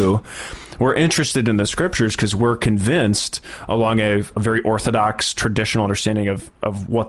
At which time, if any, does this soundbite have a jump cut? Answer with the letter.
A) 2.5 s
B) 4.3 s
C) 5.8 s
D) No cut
B